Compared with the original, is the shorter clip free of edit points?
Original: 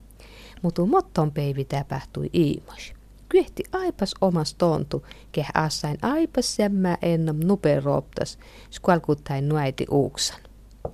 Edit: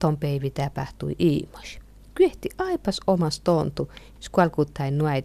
no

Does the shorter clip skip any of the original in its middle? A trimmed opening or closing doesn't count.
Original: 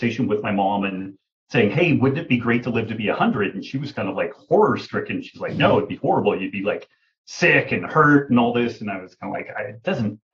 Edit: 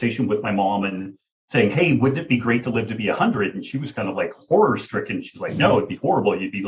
no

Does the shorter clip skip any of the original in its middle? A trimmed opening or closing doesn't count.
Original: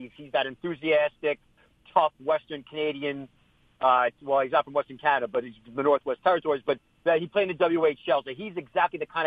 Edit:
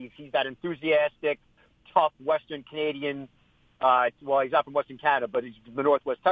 no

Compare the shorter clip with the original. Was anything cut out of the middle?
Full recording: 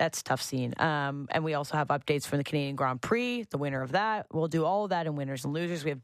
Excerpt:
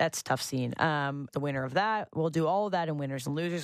yes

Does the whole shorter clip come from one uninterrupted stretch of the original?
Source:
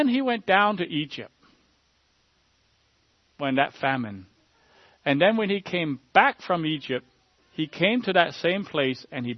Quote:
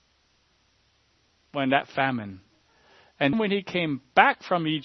no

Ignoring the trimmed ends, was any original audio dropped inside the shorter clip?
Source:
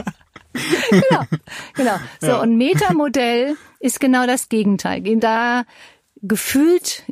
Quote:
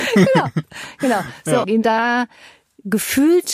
yes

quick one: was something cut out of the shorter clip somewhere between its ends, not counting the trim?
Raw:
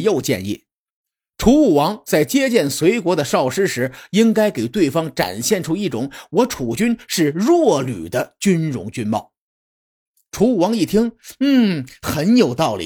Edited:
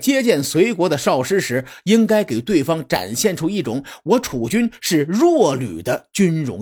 no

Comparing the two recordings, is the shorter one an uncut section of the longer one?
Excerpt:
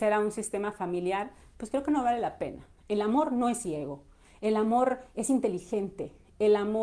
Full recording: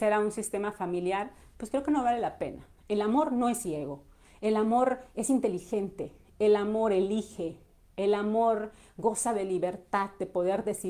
yes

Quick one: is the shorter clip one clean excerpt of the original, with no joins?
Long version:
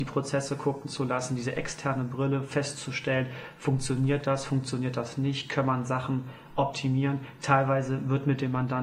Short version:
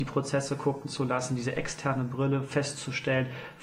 yes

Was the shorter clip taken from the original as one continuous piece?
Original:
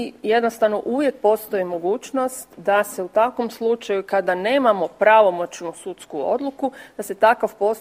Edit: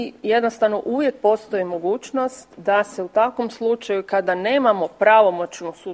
yes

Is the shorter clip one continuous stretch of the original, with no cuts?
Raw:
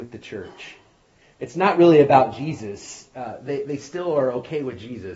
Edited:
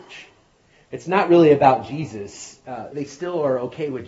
no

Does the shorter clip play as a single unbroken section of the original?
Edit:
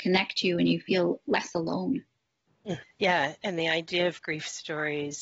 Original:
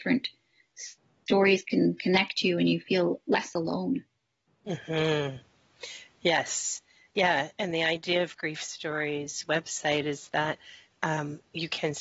no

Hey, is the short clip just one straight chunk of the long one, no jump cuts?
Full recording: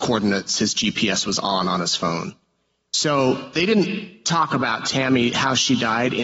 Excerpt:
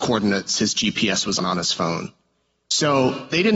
no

